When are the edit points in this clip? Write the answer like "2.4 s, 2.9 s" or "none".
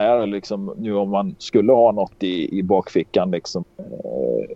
2.5 s, 3.6 s